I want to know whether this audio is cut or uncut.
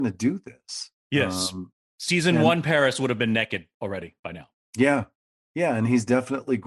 cut